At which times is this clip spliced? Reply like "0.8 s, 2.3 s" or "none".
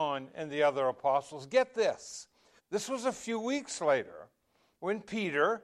2.6 s